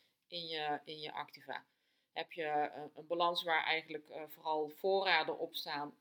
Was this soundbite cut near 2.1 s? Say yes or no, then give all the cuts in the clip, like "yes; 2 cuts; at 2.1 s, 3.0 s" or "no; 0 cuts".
no; 0 cuts